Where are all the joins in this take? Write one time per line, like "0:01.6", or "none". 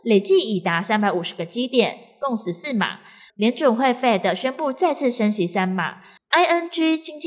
0:06.2